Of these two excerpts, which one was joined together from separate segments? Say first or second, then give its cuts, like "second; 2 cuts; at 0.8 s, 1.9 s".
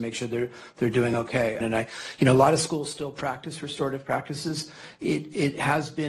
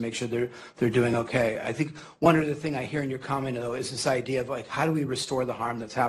first; 1 cut; at 1.6 s